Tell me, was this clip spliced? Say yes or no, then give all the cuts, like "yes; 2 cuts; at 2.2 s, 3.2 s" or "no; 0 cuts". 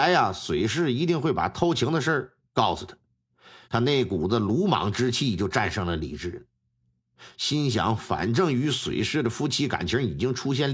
yes; 1 cut; at 3.6 s